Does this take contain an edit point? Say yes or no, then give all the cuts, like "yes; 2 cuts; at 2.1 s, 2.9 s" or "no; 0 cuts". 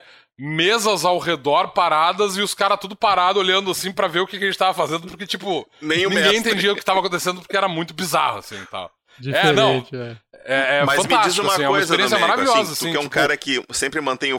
no; 0 cuts